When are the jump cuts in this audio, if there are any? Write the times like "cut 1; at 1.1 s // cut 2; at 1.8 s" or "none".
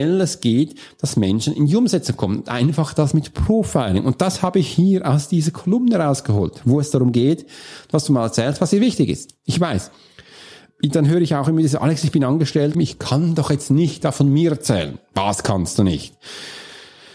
cut 1; at 12.7 s